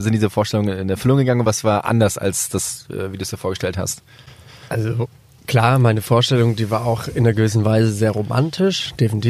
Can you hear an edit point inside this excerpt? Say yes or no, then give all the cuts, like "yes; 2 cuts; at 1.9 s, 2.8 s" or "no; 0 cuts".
no; 0 cuts